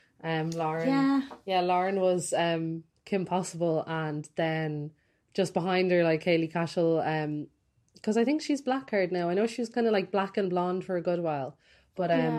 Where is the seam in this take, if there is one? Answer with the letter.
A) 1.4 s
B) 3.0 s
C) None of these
C